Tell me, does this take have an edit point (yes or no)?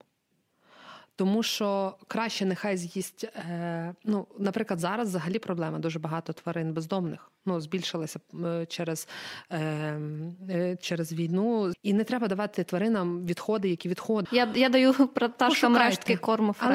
yes